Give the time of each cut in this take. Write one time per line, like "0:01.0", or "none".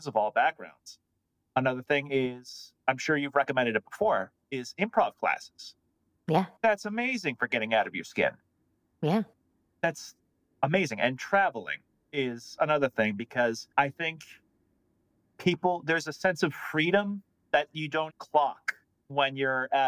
0:13.7
0:18.1